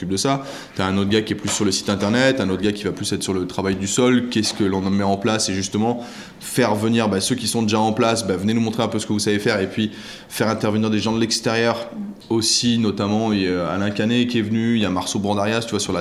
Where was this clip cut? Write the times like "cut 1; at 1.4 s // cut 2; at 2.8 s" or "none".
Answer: none